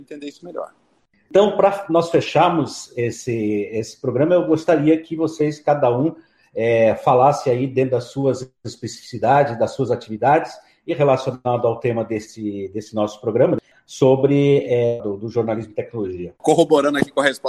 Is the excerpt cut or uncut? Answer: cut